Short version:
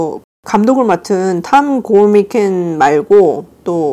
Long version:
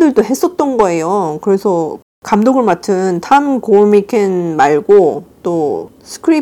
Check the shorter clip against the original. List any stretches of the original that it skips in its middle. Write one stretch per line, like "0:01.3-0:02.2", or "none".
none